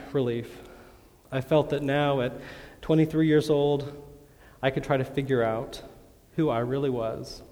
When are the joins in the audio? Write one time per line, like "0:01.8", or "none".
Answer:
none